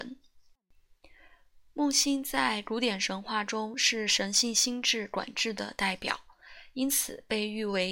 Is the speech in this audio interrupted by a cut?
no; 0 cuts

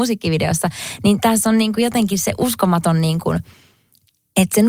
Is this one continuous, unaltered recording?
yes; 0 cuts

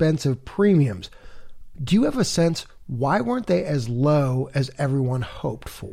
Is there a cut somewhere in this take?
no; 0 cuts

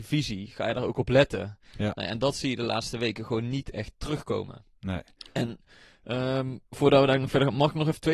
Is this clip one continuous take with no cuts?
yes; 0 cuts

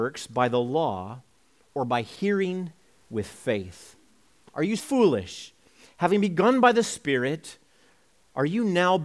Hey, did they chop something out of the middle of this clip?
yes; 1 cut; at 4.8 s

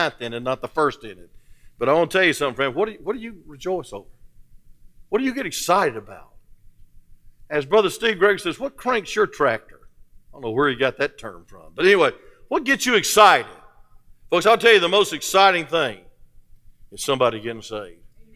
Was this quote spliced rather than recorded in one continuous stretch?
no; 0 cuts

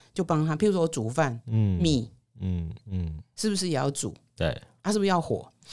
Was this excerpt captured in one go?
no; 1 cut; at 2.8 s

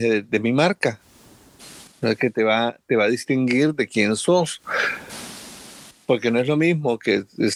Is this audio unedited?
yes; 0 cuts

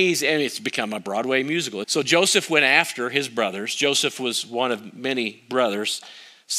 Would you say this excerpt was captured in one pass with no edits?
no; 1 cut; at 1.8 s

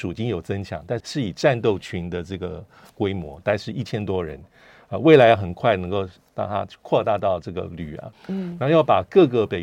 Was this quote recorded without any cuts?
no; 2 cuts; at 1.0 s, 8.1 s

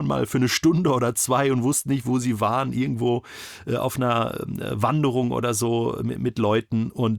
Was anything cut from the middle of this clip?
no; 0 cuts

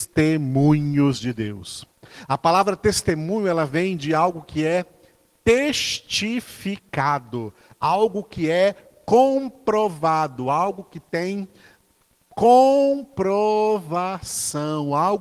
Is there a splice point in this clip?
no; 0 cuts

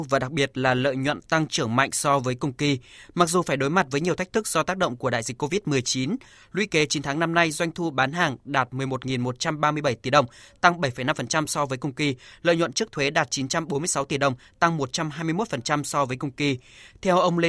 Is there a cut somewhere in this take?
no; 0 cuts

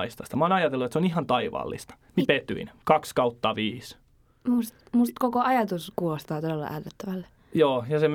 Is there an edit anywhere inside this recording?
no; 0 cuts

